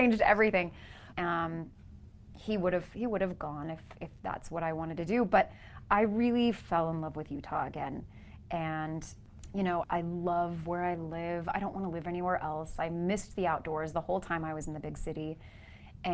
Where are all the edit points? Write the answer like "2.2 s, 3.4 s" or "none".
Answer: 1.1 s, 9.8 s